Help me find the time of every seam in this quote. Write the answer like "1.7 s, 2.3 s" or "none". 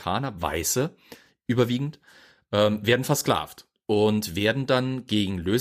none